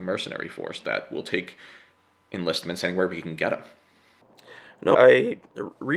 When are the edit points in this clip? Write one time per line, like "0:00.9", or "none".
0:04.9